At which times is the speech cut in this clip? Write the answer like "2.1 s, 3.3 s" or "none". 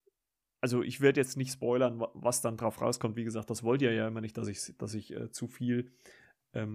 none